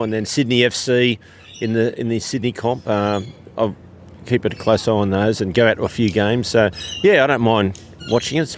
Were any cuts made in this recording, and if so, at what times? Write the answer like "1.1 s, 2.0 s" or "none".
none